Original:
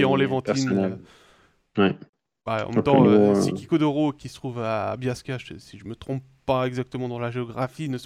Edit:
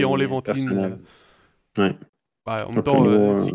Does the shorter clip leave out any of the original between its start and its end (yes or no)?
no